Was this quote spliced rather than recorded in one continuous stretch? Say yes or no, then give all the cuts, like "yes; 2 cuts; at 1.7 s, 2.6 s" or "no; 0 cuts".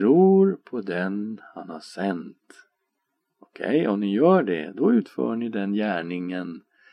no; 0 cuts